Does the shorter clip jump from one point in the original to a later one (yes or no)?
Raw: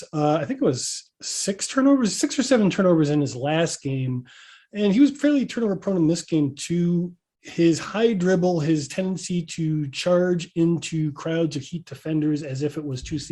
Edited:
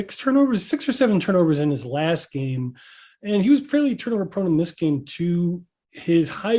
no